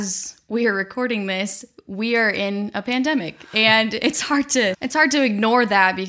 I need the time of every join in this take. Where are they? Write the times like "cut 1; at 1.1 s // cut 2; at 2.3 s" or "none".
cut 1; at 4.7 s